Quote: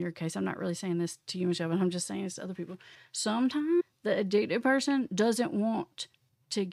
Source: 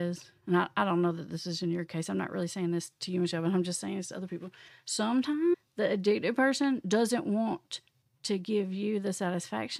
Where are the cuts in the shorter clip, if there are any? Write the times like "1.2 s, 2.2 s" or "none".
none